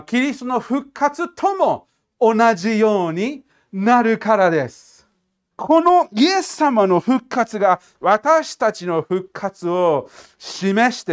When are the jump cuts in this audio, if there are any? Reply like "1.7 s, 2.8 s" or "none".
5.5 s